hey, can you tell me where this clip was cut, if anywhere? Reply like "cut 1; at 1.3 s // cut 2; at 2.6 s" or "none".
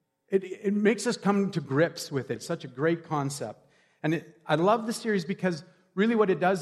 cut 1; at 2.4 s